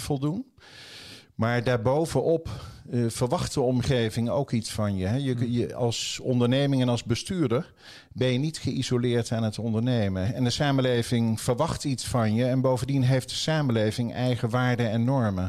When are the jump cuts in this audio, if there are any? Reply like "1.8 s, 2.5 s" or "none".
10.2 s